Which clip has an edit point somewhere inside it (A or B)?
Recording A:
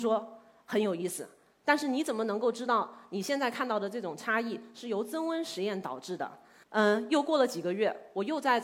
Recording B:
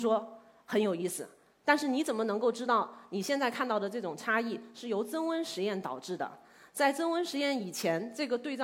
A